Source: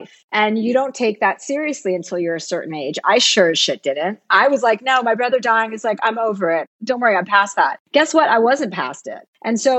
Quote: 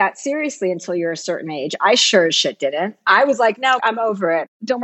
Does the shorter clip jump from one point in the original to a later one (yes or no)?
yes